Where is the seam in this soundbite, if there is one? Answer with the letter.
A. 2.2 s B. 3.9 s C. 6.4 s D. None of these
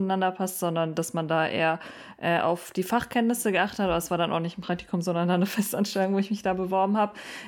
D